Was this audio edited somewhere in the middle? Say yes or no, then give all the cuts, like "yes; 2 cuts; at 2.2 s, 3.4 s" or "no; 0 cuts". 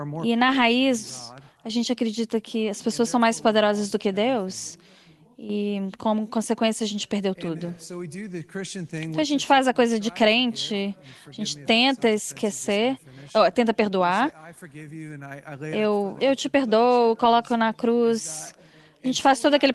yes; 1 cut; at 16.2 s